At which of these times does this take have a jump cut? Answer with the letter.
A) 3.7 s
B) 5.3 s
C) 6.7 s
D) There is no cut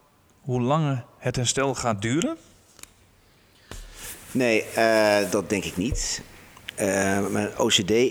B